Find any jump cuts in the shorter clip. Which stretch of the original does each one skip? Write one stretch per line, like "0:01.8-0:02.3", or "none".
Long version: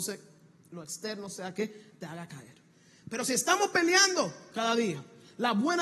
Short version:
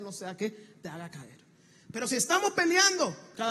none